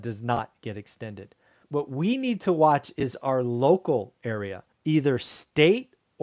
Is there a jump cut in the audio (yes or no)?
yes